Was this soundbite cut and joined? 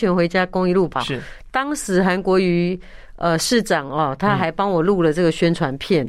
no; 0 cuts

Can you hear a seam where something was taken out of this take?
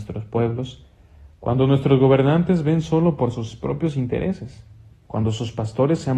yes; 1 cut; at 4.9 s

